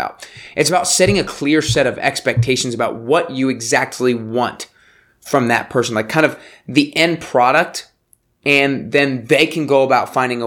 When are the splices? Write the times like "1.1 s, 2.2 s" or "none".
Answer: none